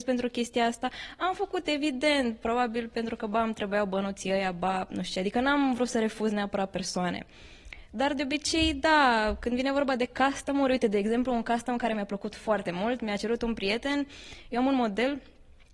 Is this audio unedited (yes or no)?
yes